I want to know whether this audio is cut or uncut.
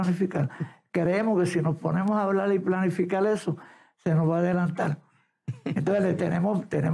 uncut